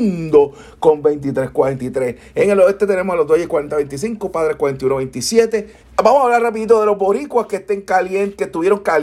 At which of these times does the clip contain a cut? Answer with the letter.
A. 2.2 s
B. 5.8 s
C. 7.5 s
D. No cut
B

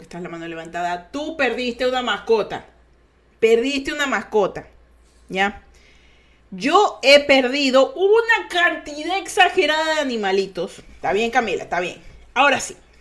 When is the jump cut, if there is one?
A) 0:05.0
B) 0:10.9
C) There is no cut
B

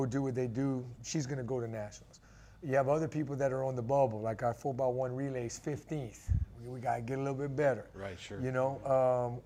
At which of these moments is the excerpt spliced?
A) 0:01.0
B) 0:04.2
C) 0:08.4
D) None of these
A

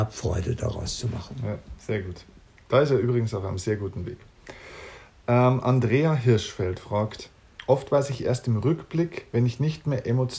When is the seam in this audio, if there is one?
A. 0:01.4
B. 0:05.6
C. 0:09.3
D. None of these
C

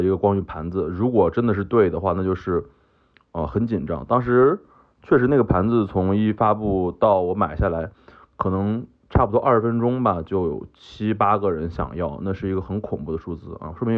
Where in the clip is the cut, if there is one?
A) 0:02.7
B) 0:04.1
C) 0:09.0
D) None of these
D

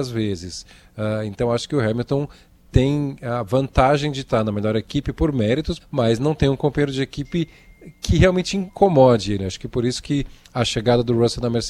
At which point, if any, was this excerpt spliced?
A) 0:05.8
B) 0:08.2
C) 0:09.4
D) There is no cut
A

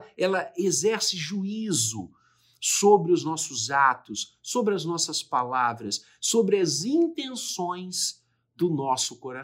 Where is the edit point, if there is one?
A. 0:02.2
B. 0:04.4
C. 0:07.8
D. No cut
D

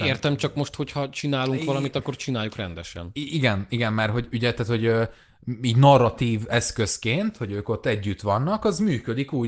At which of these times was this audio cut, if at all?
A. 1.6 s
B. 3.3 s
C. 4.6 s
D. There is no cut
D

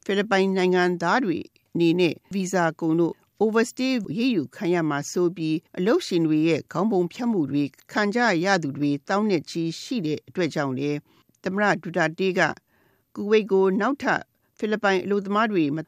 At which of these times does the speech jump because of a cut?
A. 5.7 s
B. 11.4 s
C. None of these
A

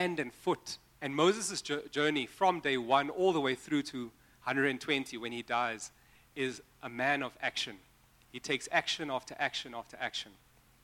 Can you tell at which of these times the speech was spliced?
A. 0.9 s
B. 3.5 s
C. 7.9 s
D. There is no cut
A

